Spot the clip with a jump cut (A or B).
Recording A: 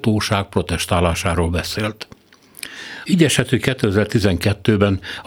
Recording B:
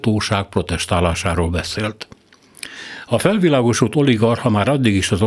A